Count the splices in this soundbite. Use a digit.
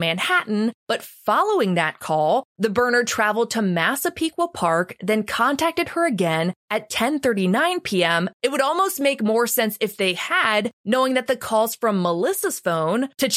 1